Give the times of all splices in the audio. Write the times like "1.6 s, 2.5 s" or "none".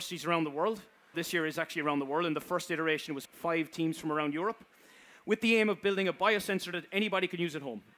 1.1 s, 3.2 s